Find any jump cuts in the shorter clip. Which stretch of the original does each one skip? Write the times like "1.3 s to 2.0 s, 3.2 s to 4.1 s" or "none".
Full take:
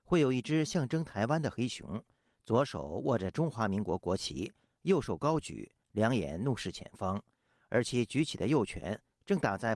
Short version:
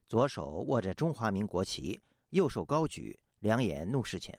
3.8 s to 4.0 s